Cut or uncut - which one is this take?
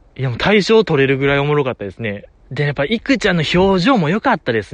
cut